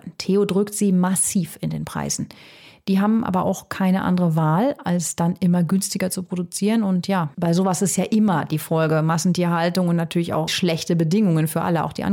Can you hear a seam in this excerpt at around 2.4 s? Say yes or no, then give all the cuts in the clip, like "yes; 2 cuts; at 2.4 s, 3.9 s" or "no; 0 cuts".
no; 2 cuts; at 7.3 s, 10.5 s